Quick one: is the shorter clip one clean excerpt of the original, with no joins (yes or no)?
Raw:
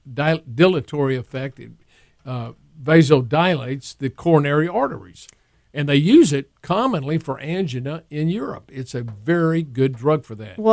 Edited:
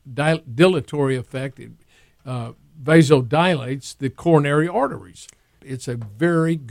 no